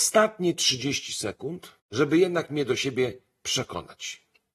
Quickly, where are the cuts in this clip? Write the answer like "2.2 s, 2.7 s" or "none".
1.8 s